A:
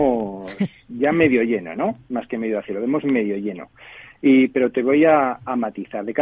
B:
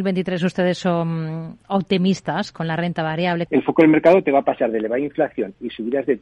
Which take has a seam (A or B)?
B